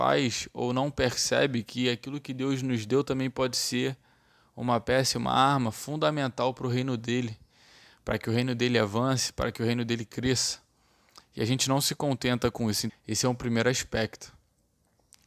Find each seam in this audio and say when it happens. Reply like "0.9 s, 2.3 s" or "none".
12.9 s